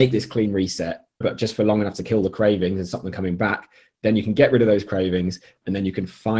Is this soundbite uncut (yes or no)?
no